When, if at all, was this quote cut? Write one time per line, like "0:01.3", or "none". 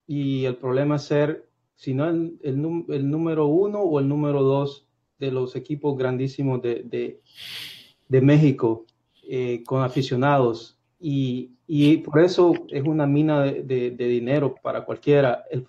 0:12.7
0:14.6